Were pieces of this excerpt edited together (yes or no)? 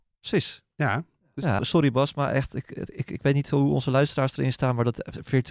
yes